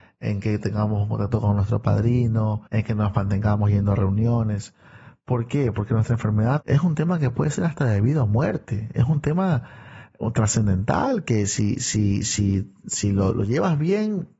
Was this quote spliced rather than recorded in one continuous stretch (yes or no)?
yes